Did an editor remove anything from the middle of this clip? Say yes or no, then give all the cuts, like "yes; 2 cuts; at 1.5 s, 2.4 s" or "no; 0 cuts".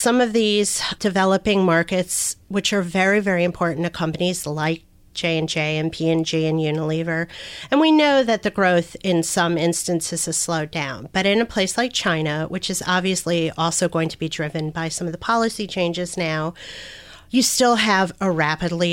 no; 0 cuts